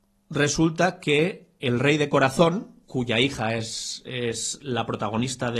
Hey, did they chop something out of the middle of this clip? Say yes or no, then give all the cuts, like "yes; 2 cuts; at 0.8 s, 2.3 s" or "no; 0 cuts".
no; 0 cuts